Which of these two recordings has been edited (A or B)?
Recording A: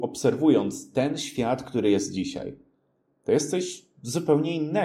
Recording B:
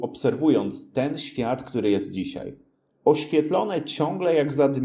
B